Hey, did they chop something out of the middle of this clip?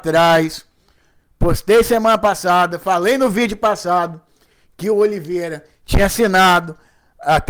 no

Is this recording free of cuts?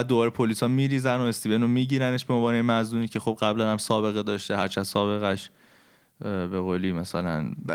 yes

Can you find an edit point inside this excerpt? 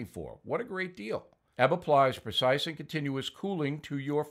yes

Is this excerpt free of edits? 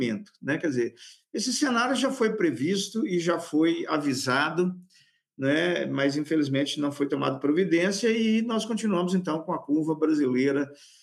yes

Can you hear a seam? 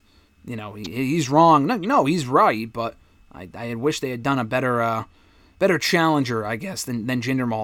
no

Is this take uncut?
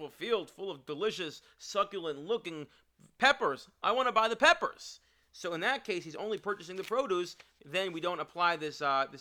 yes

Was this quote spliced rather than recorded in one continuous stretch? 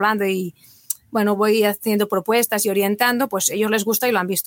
no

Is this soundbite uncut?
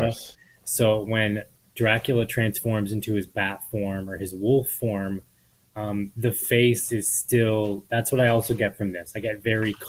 yes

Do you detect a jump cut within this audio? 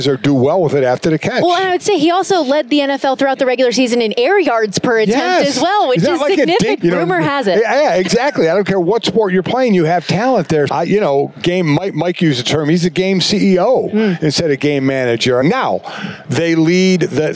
yes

